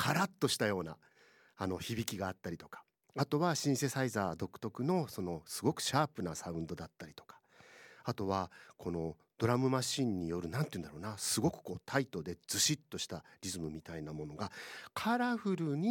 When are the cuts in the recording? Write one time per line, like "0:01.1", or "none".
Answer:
none